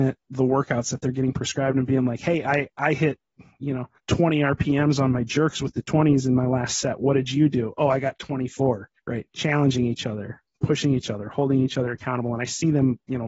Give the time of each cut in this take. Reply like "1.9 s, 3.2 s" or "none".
none